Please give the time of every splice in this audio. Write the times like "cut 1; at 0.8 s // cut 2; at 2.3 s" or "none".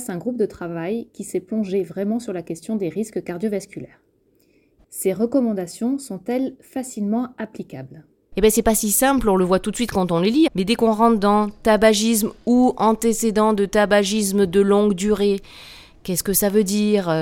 cut 1; at 4.8 s // cut 2; at 10.5 s